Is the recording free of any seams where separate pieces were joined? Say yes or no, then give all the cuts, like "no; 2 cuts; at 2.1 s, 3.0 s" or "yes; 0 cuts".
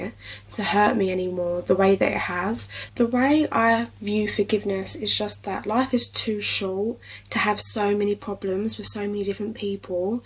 no; 1 cut; at 2.9 s